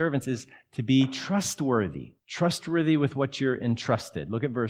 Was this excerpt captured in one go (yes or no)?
no